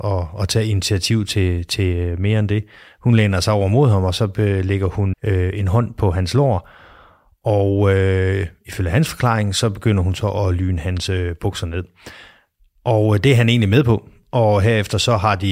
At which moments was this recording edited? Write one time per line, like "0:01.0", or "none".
0:05.1